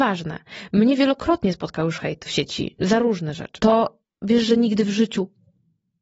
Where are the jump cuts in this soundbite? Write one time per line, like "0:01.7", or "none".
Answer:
0:02.3
0:03.6